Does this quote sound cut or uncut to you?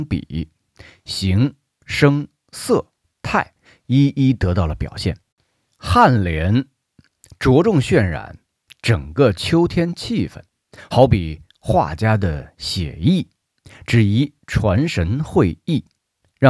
uncut